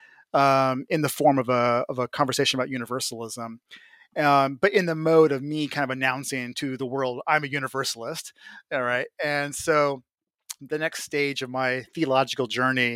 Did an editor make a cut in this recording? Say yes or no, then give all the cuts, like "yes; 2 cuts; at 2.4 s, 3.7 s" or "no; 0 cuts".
yes; 1 cut; at 10.6 s